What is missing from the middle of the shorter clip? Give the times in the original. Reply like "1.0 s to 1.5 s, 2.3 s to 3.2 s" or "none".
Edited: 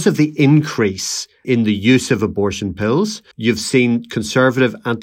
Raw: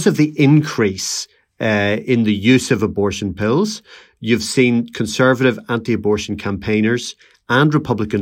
1.4 s to 2.0 s, 3.9 s to 4.1 s